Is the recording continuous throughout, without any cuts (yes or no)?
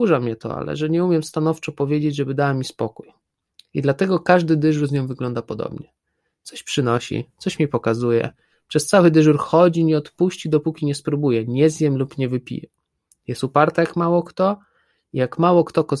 yes